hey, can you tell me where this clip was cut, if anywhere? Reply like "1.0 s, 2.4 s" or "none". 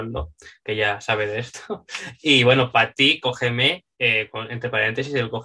3.9 s